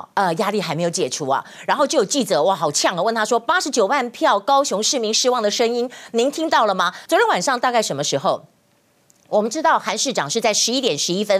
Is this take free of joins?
no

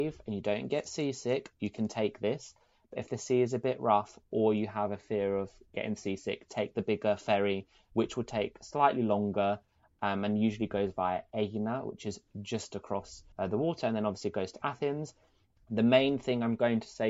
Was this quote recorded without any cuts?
no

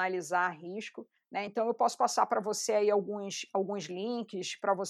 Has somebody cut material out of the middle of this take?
no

